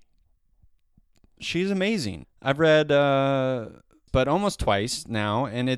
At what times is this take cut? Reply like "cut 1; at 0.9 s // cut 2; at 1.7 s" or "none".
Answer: cut 1; at 2.2 s // cut 2; at 4.1 s